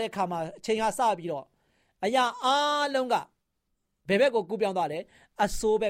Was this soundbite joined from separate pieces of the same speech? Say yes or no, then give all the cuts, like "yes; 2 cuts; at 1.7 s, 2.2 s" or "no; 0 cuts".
no; 0 cuts